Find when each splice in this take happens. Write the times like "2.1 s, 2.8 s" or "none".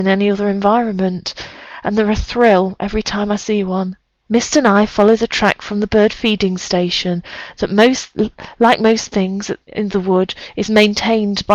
4.3 s, 9.6 s